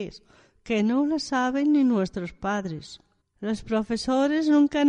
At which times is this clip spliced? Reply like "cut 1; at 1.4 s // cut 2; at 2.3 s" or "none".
cut 1; at 3.2 s